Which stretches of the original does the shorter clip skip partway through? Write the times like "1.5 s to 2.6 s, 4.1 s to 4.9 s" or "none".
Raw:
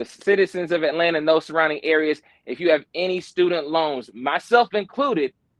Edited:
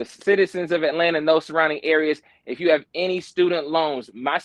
none